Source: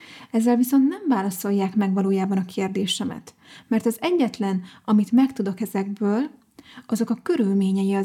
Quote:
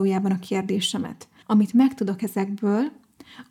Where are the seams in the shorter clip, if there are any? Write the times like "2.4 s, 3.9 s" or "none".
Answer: 1.4 s